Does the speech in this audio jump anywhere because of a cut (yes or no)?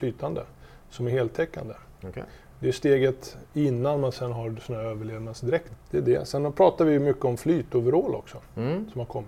yes